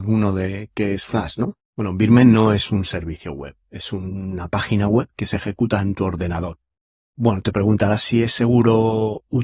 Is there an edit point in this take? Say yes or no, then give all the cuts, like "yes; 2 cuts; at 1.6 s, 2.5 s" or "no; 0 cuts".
yes; 2 cuts; at 1.7 s, 6.9 s